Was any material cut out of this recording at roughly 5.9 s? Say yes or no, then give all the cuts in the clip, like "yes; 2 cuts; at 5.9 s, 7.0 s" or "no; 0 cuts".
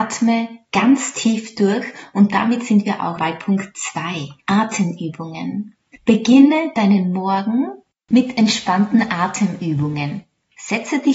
no; 1 cut; at 3.2 s